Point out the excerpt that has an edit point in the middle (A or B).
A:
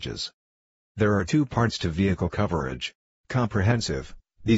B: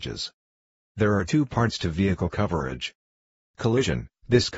A